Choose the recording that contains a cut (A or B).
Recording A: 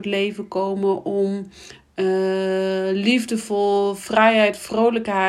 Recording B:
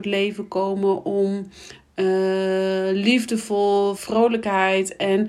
B